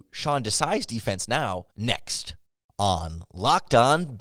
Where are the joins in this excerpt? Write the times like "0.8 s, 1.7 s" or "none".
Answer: 1.7 s